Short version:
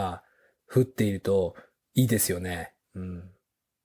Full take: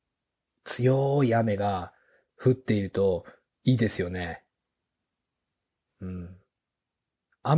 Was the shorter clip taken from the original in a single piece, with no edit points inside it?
no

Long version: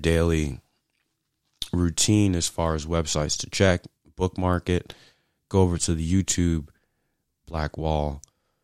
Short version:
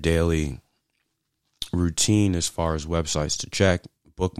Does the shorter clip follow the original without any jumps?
yes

